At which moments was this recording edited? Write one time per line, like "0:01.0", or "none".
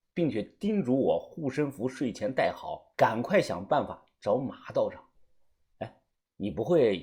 0:02.9
0:05.7